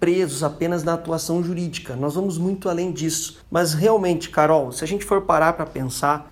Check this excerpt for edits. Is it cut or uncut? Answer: cut